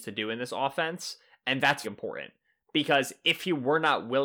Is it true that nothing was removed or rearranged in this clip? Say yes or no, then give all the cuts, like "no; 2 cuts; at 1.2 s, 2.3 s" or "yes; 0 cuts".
no; 1 cut; at 1.8 s